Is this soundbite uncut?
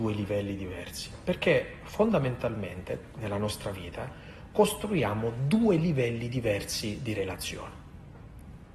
yes; 0 cuts

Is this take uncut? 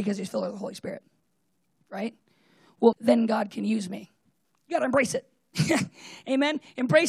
no; 2 cuts; at 2.9 s, 4.4 s

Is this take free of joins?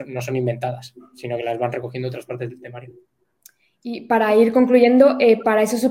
yes; 0 cuts

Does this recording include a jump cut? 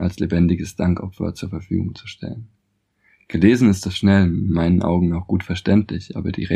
no; 0 cuts

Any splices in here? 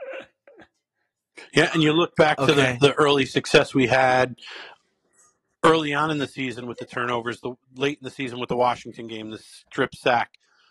no; 0 cuts

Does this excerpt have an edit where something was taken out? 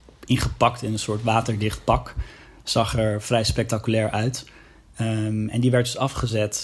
no; 0 cuts

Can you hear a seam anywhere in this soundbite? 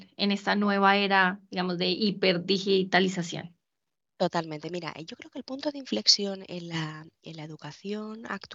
no; 0 cuts

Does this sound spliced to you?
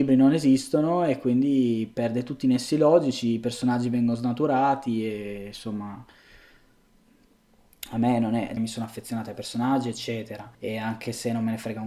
yes; 2 cuts; at 8.6 s, 10.5 s

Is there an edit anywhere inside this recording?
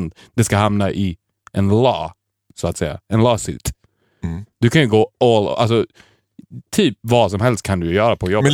no; 0 cuts

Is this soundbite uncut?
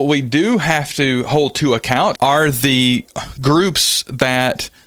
no; 1 cut; at 2.2 s

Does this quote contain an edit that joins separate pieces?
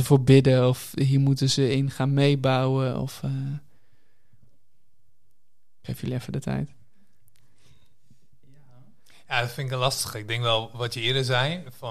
no; 0 cuts

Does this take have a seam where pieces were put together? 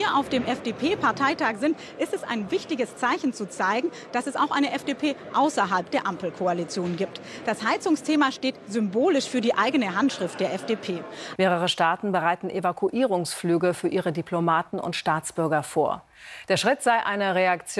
yes; 2 cuts; at 11.4 s, 16.5 s

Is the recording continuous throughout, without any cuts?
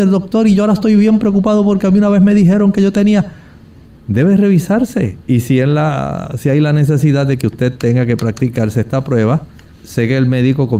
no; 2 cuts; at 4.0 s, 9.7 s

